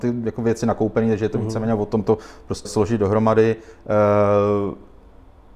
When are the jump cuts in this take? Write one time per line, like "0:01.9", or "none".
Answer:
0:02.6